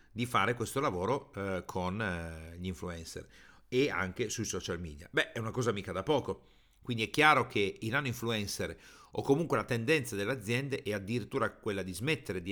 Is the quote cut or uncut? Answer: uncut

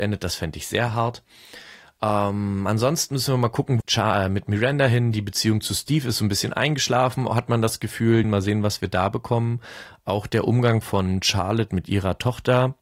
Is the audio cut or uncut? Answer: cut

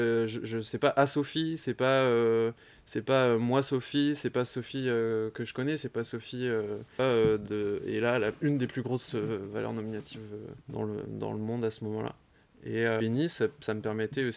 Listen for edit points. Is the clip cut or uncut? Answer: cut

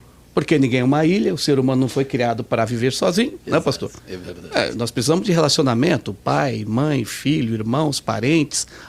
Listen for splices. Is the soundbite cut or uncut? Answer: uncut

